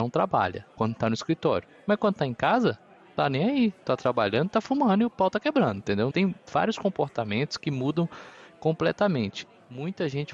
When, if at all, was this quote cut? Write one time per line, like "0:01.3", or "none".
0:06.1